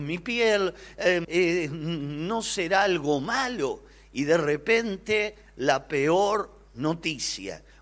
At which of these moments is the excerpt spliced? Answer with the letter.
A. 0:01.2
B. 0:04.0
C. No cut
A